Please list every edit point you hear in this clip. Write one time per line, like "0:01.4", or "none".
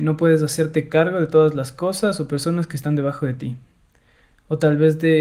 none